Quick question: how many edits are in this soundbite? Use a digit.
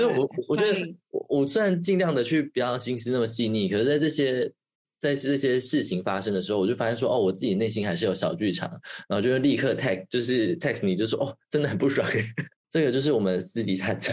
2